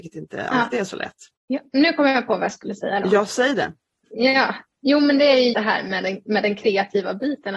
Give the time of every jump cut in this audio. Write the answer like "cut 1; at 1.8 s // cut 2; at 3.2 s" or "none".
cut 1; at 1.4 s // cut 2; at 5.5 s

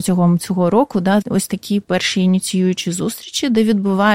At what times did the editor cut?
cut 1; at 1.2 s

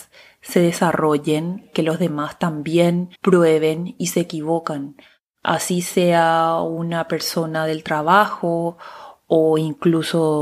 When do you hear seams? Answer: cut 1; at 3.1 s

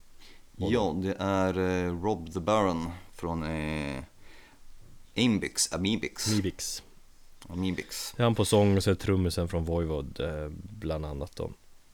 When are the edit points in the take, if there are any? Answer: none

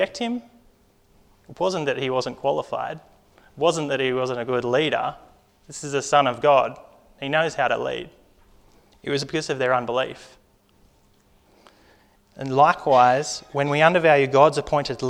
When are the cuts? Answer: cut 1; at 12.2 s

